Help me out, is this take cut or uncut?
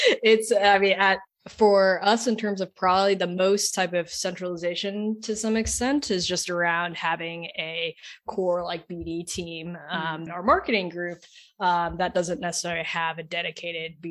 cut